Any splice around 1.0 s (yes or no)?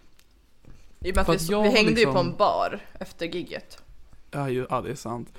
yes